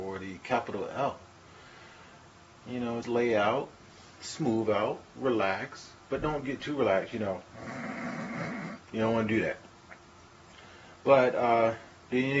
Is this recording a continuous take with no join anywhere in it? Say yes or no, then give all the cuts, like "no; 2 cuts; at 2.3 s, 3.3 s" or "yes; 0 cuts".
no; 1 cut; at 3.0 s